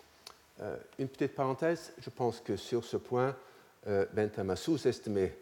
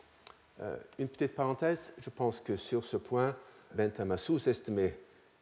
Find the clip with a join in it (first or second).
second